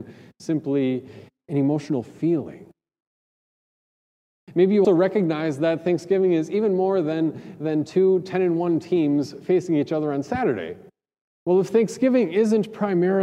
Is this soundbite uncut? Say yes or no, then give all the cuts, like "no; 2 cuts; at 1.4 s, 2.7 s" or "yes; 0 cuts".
no; 2 cuts; at 4.8 s, 11.3 s